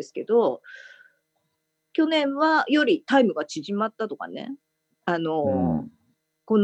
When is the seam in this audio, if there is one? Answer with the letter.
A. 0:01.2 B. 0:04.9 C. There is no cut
B